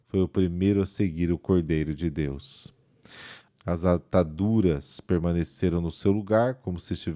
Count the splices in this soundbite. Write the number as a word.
one